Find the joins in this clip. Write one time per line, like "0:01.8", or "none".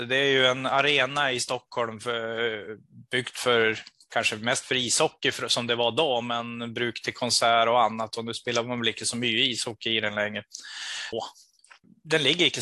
0:11.1

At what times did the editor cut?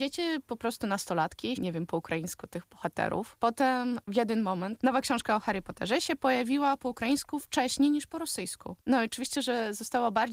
0:01.6

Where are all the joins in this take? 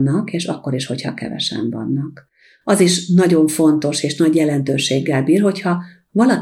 none

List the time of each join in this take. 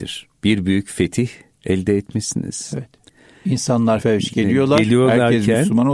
0:04.0

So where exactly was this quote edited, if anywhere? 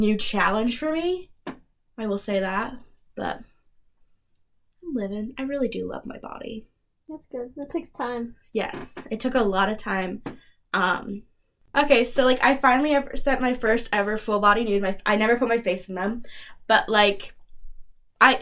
none

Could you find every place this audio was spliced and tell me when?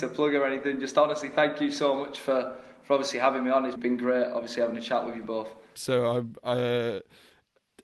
0:03.8
0:05.8

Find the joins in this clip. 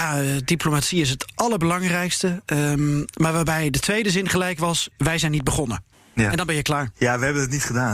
none

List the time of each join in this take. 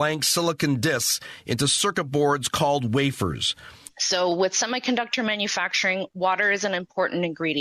none

